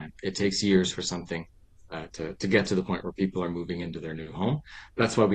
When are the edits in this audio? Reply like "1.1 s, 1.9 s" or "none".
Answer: 2.1 s